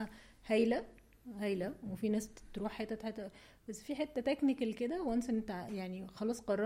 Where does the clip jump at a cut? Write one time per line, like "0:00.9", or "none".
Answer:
none